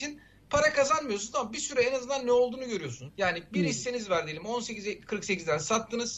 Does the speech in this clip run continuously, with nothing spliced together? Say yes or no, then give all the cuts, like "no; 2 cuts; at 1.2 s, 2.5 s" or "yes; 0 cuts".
no; 1 cut; at 3.1 s